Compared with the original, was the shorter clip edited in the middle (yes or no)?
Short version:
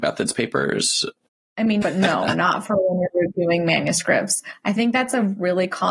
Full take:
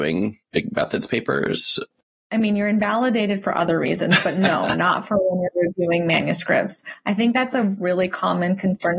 yes